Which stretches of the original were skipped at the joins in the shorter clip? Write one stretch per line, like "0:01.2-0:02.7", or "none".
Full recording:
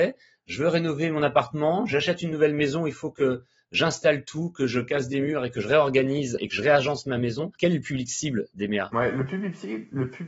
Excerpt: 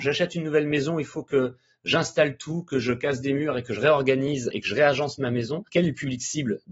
none